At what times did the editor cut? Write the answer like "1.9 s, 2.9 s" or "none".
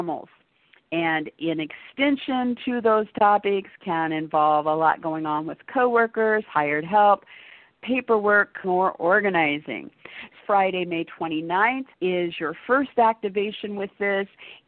8.6 s, 10.4 s, 11.9 s

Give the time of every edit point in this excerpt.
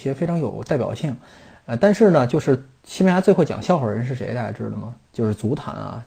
5.0 s

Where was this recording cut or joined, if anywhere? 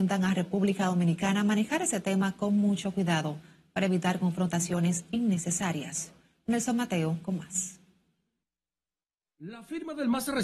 none

